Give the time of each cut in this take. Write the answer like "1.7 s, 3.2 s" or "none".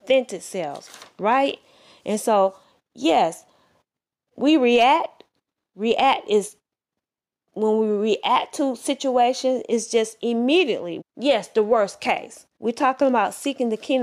11.0 s, 12.6 s